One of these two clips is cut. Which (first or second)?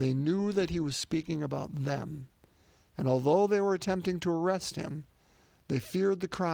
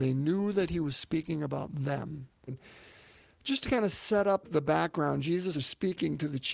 second